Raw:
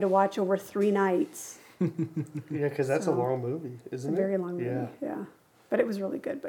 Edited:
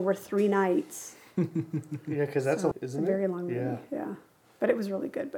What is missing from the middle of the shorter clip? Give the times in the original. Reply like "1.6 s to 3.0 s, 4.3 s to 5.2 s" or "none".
3.1 s to 3.8 s

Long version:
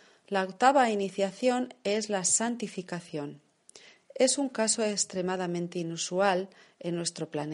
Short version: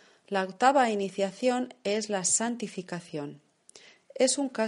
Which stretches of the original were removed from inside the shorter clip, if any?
none

